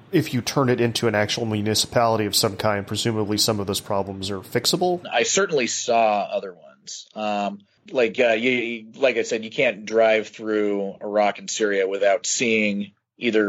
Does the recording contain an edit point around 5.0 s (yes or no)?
yes